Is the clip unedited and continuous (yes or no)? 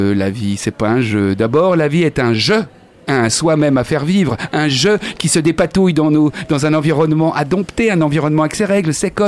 yes